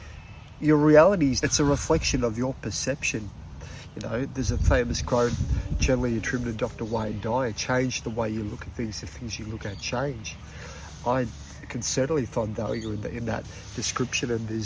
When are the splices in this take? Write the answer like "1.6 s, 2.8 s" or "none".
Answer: 1.4 s